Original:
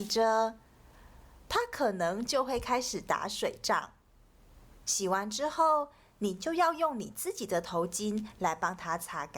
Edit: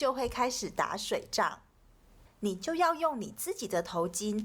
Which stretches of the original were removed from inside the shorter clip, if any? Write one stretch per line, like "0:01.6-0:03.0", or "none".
0:04.6-0:06.0